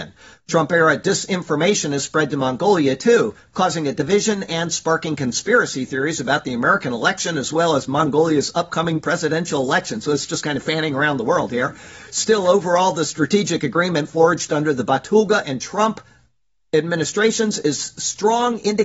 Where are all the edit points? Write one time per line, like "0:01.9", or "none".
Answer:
none